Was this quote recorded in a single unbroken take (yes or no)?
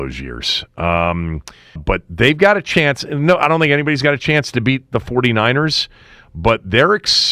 no